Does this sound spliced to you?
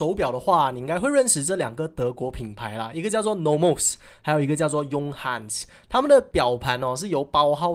no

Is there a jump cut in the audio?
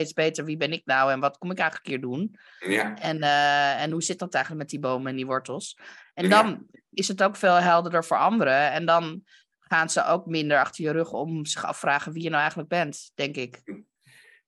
no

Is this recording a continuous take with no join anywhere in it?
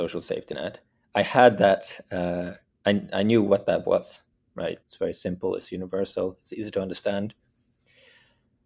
no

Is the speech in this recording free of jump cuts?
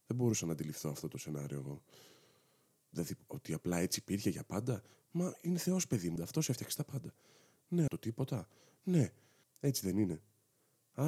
no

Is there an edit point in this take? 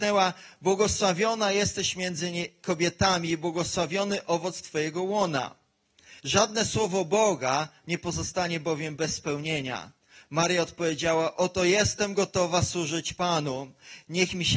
yes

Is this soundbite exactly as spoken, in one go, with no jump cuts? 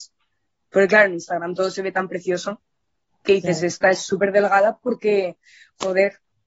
yes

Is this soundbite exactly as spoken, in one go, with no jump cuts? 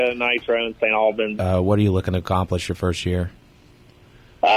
no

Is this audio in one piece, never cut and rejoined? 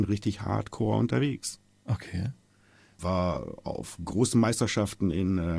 no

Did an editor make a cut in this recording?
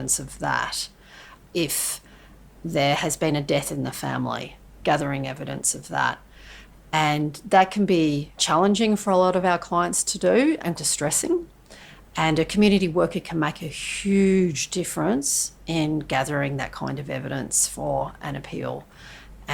yes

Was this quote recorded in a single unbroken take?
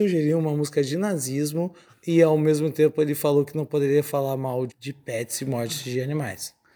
no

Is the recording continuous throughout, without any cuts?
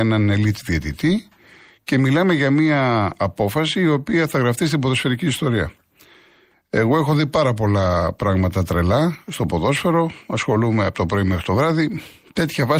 yes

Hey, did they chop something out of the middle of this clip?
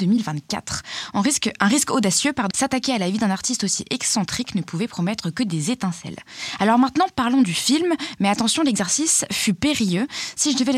yes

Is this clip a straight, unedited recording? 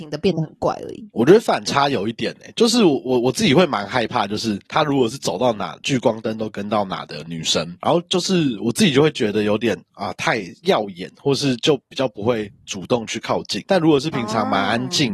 yes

